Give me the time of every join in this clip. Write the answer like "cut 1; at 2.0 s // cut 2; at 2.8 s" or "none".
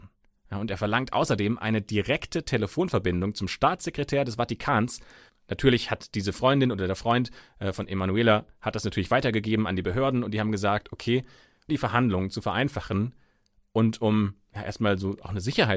cut 1; at 11.7 s